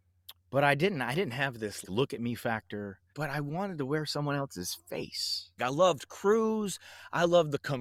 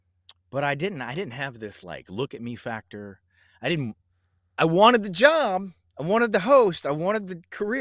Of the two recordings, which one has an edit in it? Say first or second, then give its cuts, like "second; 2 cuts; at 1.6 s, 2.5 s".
first; 3 cuts; at 1.8 s, 3.1 s, 5.6 s